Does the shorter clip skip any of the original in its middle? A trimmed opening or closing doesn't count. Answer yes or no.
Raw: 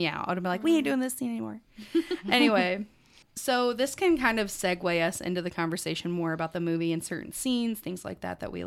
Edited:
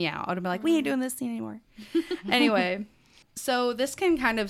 no